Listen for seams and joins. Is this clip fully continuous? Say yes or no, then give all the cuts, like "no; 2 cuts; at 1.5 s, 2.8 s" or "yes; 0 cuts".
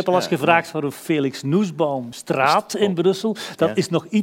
yes; 0 cuts